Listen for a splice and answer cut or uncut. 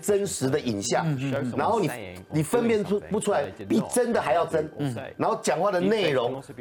uncut